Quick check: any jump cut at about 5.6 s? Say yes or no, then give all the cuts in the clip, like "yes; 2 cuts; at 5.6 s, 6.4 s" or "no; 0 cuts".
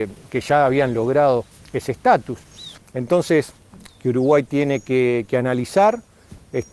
no; 2 cuts; at 2.8 s, 3.9 s